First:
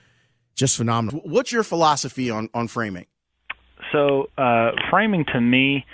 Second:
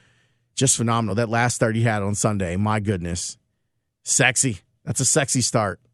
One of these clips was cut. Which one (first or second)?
first